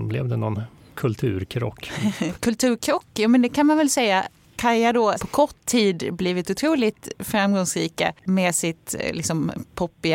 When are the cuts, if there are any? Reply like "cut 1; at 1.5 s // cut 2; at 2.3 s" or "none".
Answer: cut 1; at 2.3 s // cut 2; at 5.2 s